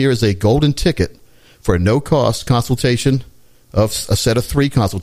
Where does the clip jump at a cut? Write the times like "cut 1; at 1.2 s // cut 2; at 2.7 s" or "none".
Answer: none

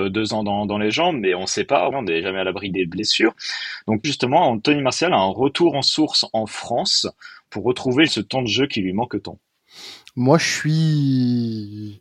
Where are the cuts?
cut 1; at 1.9 s // cut 2; at 4.0 s // cut 3; at 8.1 s

